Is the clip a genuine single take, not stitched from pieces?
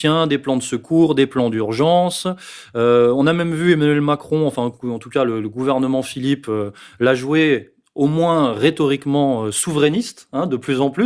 yes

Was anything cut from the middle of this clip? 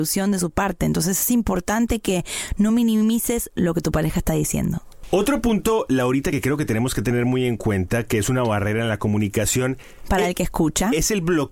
no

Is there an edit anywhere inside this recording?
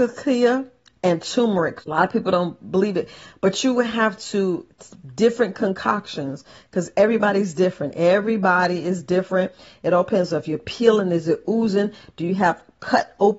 yes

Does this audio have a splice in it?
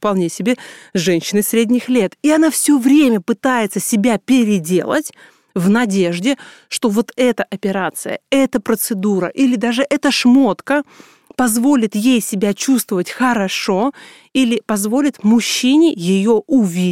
no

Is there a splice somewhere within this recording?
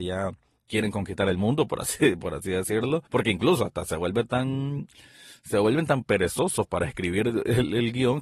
yes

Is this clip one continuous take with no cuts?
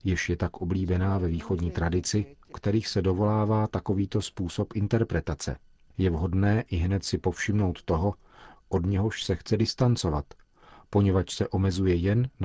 no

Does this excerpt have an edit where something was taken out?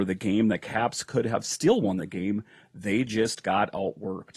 no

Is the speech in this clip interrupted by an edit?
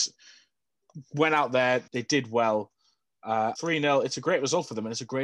yes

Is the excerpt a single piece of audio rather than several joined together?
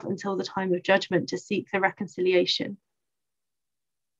yes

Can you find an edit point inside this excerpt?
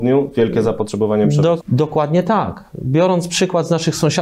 yes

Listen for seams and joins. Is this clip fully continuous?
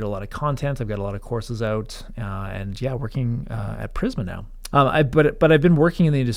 no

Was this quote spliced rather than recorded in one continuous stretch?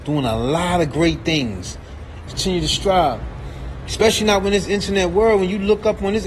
yes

